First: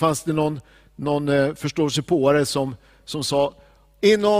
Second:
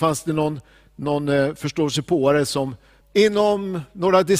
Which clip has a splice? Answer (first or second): second